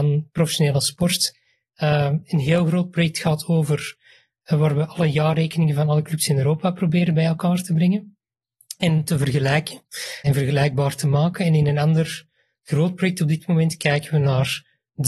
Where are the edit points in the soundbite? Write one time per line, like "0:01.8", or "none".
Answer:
0:10.2